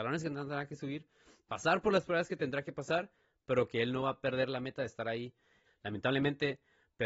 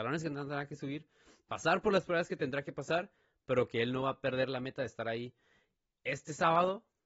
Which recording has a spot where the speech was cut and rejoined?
first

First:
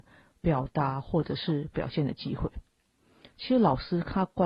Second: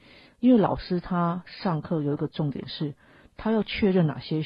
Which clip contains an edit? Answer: first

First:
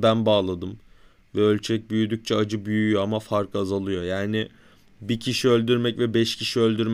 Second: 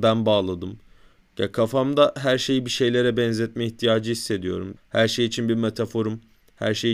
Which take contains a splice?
second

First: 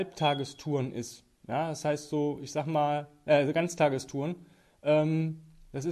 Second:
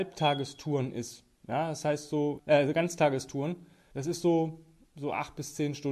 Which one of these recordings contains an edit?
second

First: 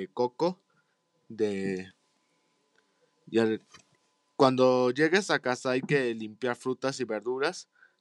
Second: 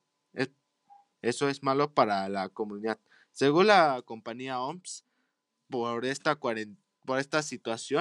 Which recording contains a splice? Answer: second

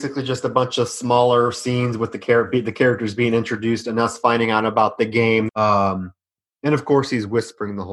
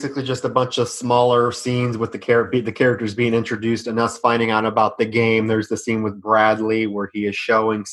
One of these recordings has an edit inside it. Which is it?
first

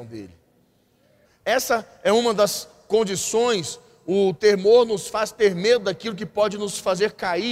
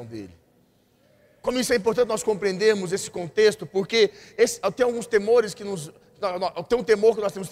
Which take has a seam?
first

